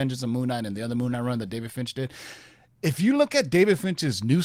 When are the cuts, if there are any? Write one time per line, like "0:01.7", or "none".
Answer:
none